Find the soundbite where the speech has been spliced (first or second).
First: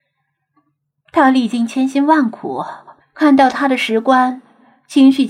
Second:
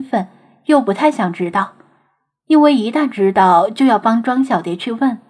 first